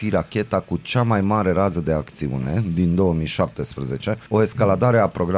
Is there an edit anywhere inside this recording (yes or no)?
yes